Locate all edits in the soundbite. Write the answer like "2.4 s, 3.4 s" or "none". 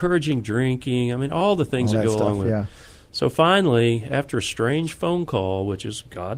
none